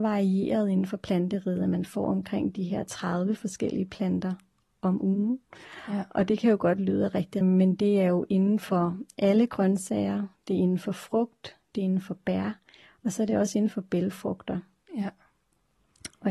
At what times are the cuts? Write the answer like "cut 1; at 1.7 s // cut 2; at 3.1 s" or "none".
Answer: cut 1; at 7.4 s